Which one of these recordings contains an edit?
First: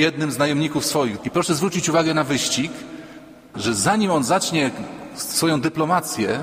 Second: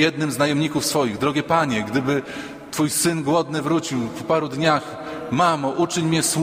first; 2 cuts; at 1.2 s, 3.5 s

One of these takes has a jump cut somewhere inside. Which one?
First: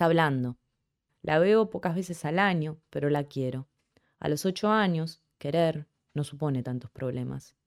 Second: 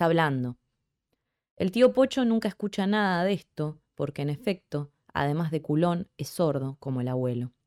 first; 1 cut; at 1.1 s

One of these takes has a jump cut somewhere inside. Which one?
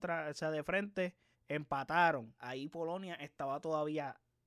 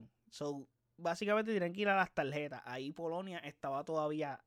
first; 2 cuts; at 1.3 s, 2.4 s

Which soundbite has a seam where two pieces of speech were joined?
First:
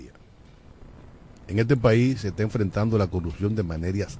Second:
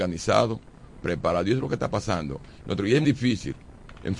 second; 1 cut; at 3.0 s

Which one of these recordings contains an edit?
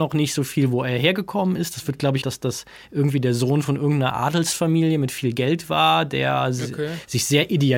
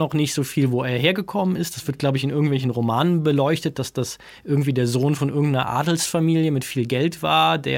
first; 1 cut; at 2.2 s

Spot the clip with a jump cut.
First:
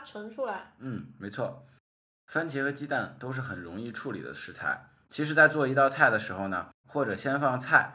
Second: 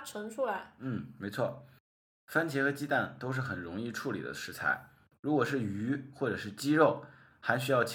first; 2 cuts; at 5.0 s, 6.8 s

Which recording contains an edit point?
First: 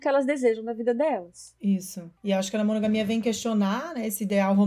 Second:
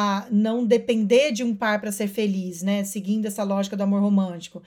first; 1 cut; at 2.2 s

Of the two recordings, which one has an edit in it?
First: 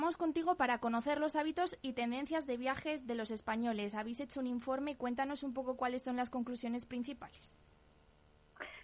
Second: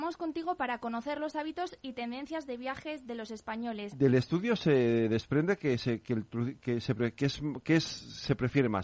second; 1 cut; at 3.9 s

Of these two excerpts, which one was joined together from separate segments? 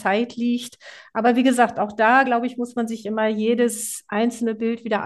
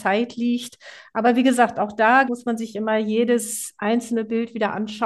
second; 1 cut; at 2.2 s

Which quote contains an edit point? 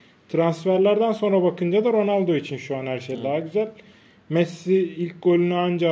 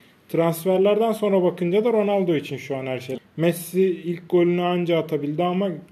second; 1 cut; at 3.2 s

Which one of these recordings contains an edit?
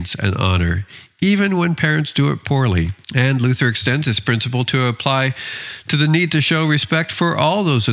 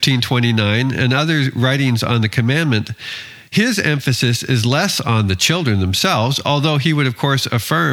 first; 1 cut; at 3.0 s

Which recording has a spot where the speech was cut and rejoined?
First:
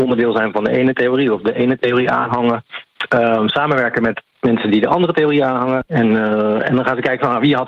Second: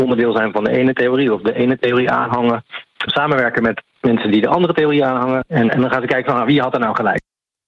second; 2 cuts; at 3.1 s, 5.7 s

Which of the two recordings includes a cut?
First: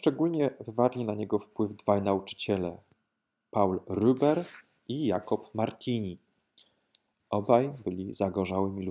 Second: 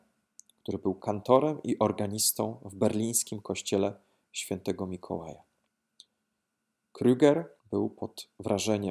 second; 1 cut; at 7.6 s

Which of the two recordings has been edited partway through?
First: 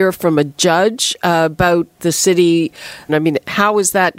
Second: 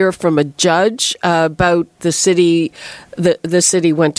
first; 1 cut; at 3.1 s

